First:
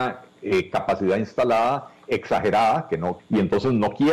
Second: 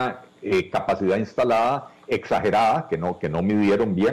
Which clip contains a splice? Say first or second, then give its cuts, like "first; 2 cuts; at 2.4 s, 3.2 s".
first; 1 cut; at 3.2 s